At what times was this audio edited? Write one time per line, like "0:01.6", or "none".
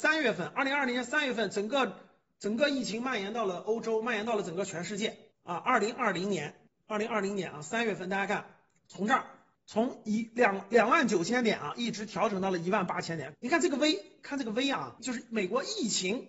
0:13.3
0:15.0